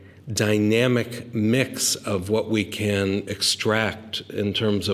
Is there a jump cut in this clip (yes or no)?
no